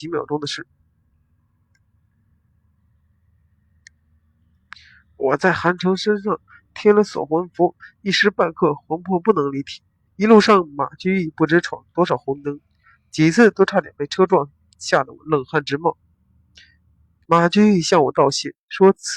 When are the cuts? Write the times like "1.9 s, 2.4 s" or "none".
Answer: 10.1 s, 17.3 s

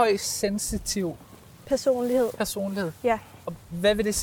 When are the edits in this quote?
none

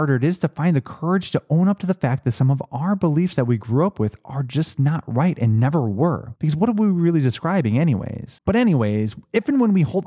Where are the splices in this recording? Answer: 6.4 s, 8.4 s

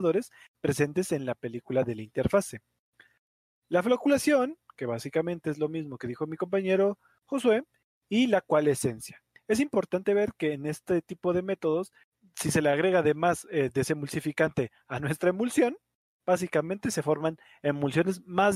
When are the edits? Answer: none

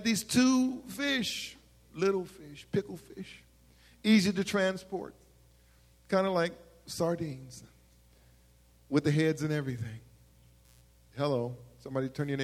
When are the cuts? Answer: none

